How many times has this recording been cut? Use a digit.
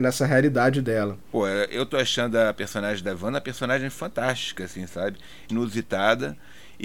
1